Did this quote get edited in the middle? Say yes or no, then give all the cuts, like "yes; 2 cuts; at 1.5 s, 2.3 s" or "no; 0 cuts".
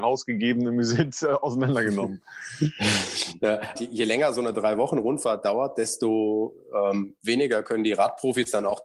yes; 1 cut; at 3.8 s